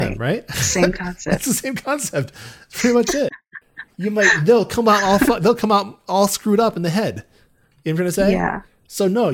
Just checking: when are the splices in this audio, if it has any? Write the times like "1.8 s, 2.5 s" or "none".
none